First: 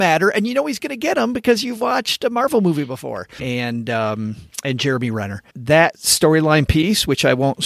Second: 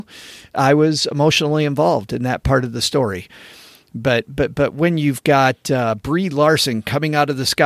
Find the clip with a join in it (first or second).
first